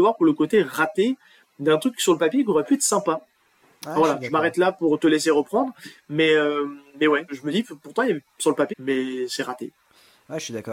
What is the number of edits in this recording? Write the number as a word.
two